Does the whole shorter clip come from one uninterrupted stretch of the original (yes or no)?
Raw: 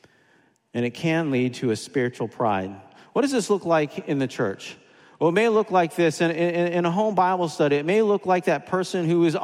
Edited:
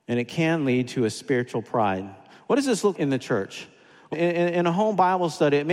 no